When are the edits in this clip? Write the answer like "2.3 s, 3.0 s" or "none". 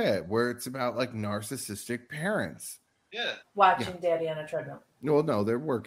3.4 s